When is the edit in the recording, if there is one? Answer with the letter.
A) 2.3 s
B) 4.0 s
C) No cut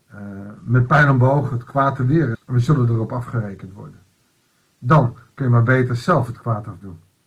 A